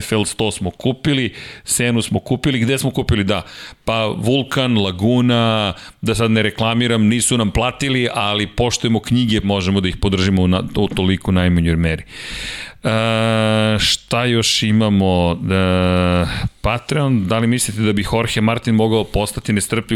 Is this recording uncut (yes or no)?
no